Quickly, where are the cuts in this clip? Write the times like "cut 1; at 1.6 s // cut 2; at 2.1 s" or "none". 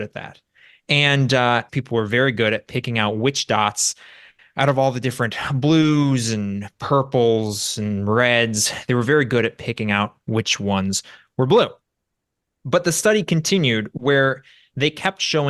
cut 1; at 1.7 s